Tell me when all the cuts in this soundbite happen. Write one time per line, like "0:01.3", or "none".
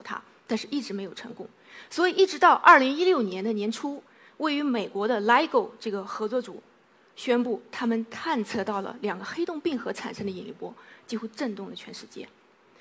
none